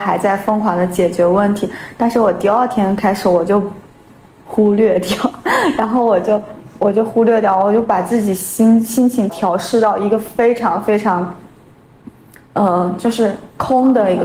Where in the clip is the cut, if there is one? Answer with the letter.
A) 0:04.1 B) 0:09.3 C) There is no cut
B